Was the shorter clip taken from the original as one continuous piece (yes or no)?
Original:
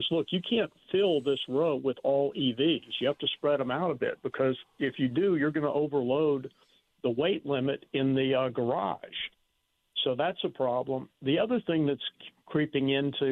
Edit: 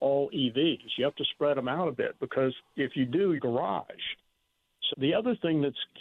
no